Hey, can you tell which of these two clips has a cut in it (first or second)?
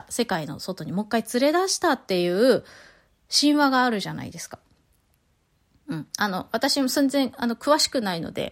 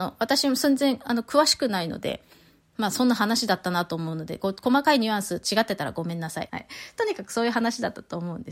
second